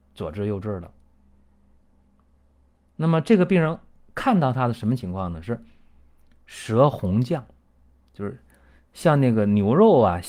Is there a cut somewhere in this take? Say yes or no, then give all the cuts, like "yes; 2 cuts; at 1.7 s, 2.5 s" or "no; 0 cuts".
no; 0 cuts